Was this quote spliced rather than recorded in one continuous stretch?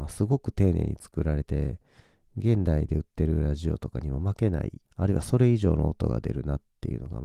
yes; 2 cuts; at 1.4 s, 4.8 s

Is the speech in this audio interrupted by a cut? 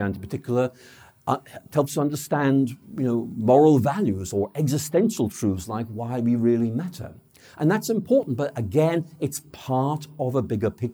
no; 0 cuts

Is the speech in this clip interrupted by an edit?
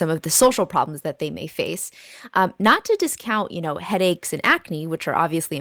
no; 0 cuts

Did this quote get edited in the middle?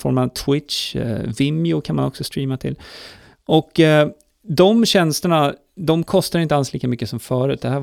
no; 0 cuts

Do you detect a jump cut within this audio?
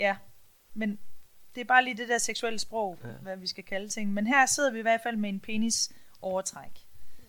no; 0 cuts

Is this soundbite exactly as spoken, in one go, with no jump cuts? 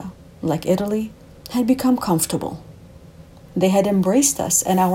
no; 1 cut; at 3.5 s

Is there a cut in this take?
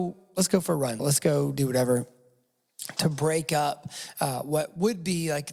yes; 1 cut; at 1.0 s

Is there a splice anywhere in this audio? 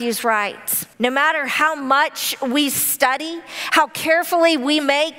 yes; 1 cut; at 0.9 s

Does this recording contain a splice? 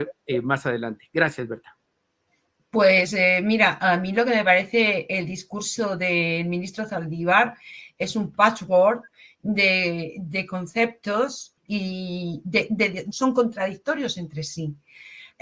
yes; 2 cuts; at 11.6 s, 13.1 s

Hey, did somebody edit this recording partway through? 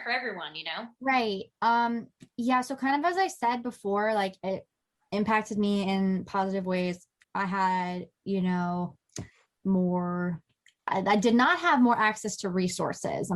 yes; 1 cut; at 7.2 s

